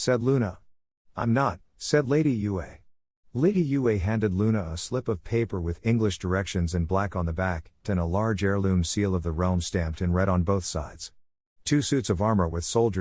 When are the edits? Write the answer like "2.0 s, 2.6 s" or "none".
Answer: 7.8 s